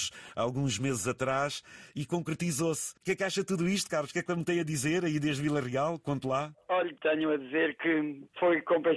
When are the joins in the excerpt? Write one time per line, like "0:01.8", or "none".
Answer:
0:06.9